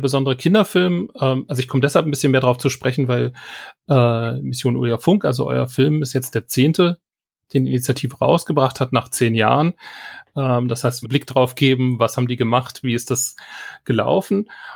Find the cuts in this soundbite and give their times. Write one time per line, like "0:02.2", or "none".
0:11.0